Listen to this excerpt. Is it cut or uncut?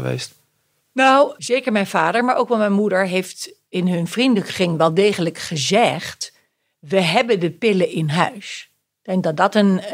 uncut